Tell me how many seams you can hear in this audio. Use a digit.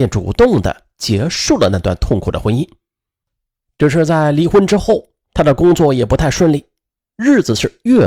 1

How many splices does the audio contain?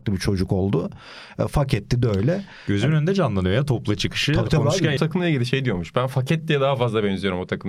1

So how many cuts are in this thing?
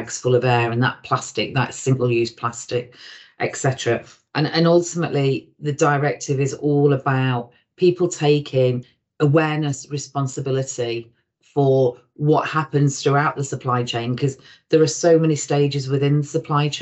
0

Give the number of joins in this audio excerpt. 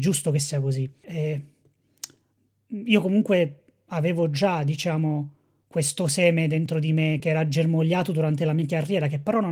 2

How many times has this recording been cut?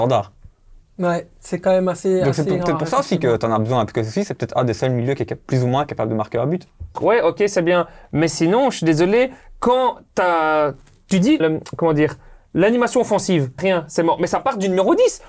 3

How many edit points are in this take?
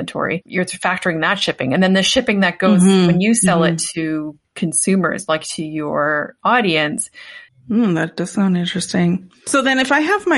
2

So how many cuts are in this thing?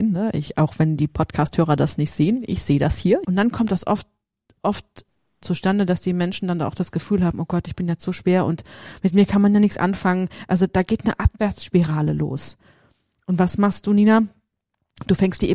2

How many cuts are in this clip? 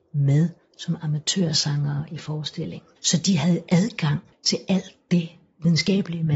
2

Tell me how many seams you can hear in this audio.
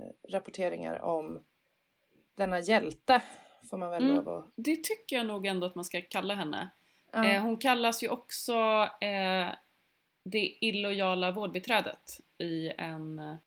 1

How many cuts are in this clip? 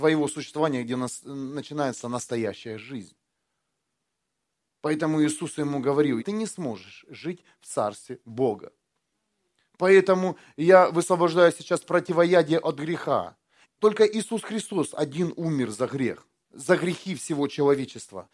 3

